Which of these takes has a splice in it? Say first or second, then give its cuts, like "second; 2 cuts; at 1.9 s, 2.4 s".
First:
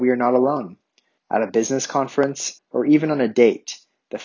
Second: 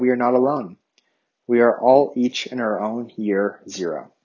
first; 2 cuts; at 1.2 s, 2.6 s